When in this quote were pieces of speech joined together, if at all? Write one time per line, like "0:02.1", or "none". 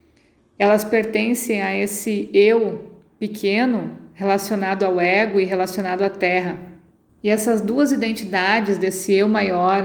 0:07.1